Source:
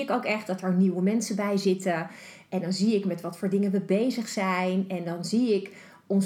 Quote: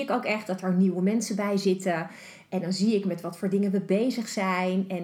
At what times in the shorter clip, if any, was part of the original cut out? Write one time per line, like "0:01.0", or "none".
none